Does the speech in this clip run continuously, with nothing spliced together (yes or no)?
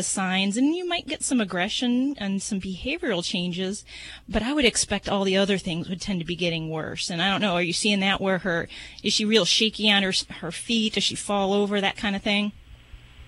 yes